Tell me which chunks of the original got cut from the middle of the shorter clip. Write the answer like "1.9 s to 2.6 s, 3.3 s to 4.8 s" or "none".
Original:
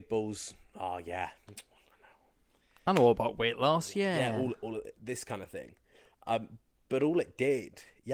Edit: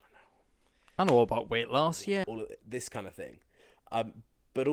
4.1 s to 4.6 s